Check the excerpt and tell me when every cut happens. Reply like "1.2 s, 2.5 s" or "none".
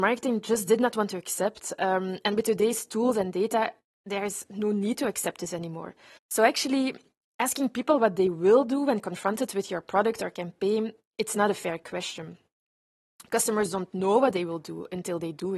6.2 s

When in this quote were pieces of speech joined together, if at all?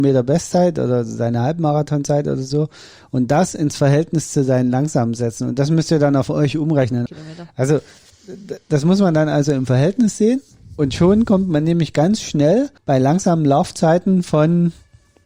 7.1 s, 12.8 s

